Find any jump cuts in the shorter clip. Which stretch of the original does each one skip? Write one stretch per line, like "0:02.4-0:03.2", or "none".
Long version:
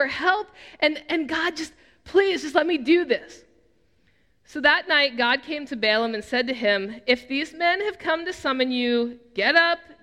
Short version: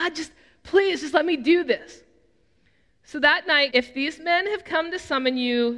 0:05.1-0:07.0